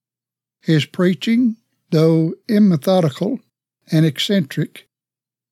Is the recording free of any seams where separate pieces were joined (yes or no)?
yes